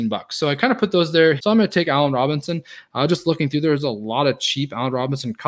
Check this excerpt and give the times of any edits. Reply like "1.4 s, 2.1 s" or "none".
1.4 s

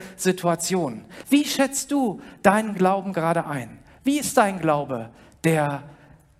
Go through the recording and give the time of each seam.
none

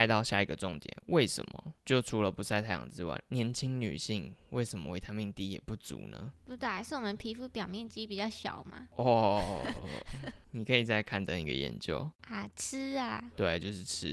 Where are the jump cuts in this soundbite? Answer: none

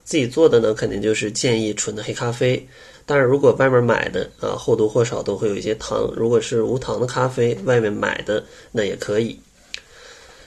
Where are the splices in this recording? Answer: 2.9 s

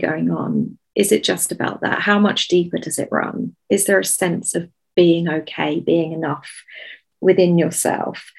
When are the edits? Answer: none

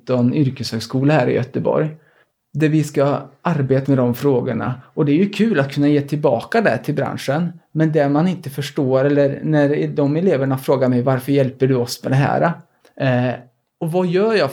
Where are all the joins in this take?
3.8 s, 12.8 s

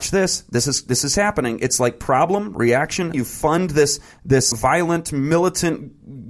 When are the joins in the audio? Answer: 3.1 s, 4.5 s

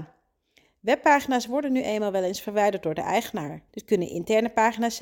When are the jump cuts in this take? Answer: 3.7 s

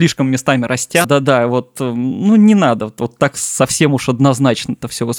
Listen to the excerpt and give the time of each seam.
1.0 s

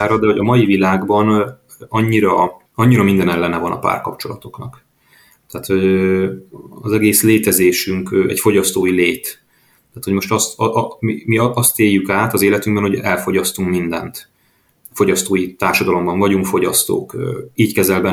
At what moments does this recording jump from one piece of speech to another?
2.7 s

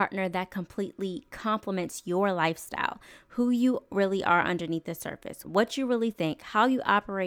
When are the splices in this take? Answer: 5.4 s

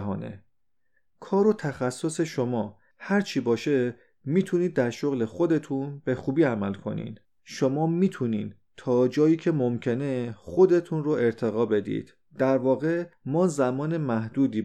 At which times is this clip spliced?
7.4 s, 12.3 s

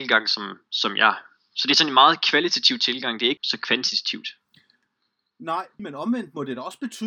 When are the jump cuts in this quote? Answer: 3.4 s, 5.8 s

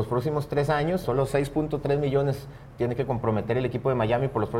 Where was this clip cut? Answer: 1.0 s

